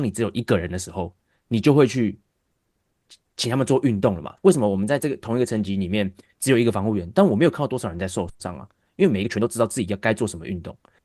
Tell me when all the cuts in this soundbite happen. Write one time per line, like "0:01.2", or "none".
0:04.4
0:08.3